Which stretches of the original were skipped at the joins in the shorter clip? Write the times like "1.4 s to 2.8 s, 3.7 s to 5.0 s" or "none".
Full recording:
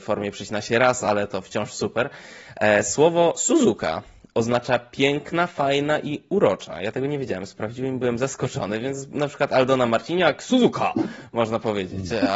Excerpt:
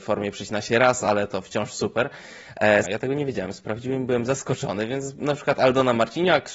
2.8 s to 6.8 s